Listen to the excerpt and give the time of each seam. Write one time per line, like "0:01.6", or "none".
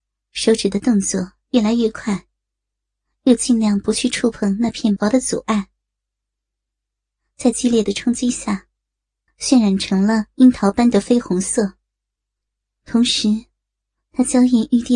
0:05.0
0:09.3